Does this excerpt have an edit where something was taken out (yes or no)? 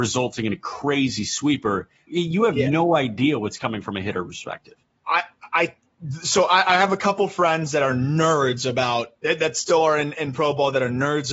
yes